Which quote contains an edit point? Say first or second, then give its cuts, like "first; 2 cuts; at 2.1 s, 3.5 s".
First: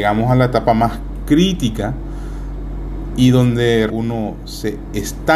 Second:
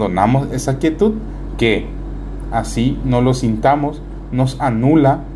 first; 1 cut; at 3.9 s